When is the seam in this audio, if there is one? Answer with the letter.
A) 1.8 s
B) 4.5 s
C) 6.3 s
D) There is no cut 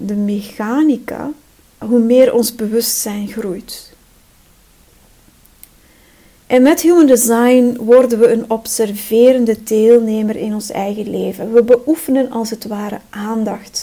A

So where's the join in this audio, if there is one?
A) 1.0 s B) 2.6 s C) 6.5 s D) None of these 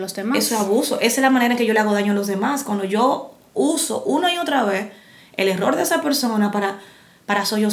D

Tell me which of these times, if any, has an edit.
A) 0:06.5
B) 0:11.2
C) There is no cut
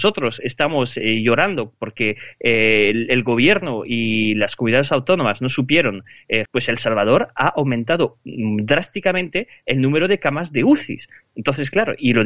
A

